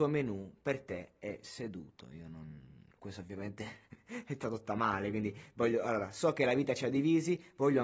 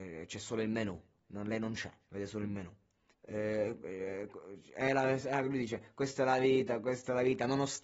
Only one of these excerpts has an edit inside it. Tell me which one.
second; 1 cut; at 3.1 s

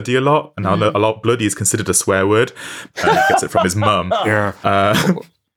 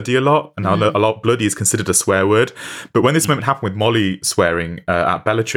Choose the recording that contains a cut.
first; 1 cut; at 2.9 s

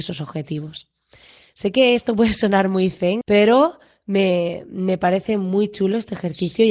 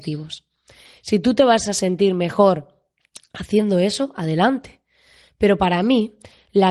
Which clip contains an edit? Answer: first; 2 cuts; at 1.4 s, 3.2 s

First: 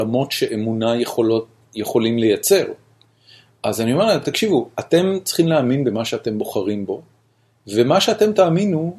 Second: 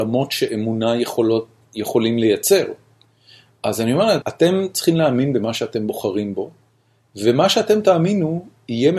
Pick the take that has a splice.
second; 1 cut; at 4.2 s

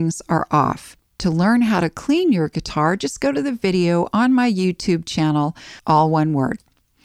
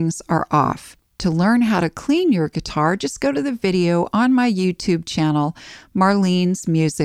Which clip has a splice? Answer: first; 1 cut; at 5.8 s

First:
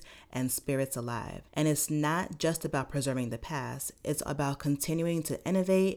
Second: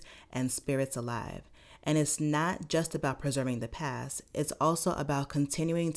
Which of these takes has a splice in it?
first; 2 cuts; at 1.5 s, 4.3 s

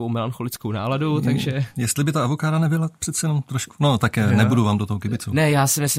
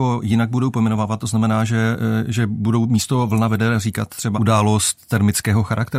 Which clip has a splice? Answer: second; 1 cut; at 4.4 s

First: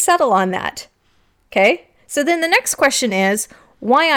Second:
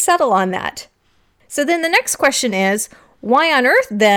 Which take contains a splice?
second; 1 cut; at 1.4 s

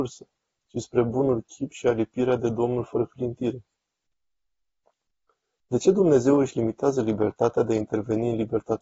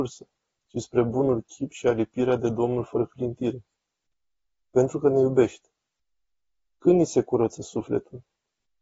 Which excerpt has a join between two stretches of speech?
second; 1 cut; at 4.7 s

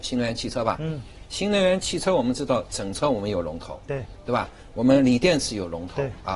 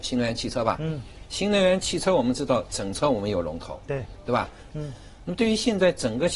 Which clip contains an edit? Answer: second; 1 cut; at 4.7 s

